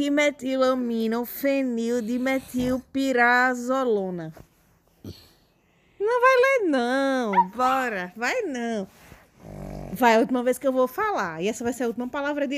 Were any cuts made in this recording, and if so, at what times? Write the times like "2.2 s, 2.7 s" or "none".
none